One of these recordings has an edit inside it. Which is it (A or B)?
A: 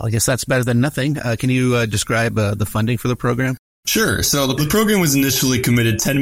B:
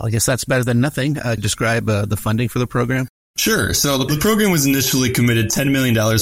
B